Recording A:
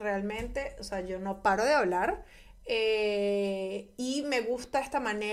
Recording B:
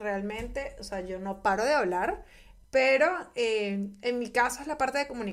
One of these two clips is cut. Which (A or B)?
B